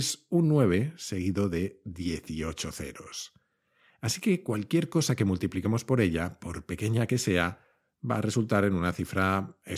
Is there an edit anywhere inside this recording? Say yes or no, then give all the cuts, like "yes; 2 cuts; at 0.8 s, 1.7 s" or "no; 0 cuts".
no; 0 cuts